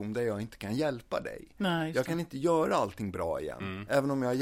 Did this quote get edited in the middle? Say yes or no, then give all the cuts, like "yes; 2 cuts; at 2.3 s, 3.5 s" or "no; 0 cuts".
no; 0 cuts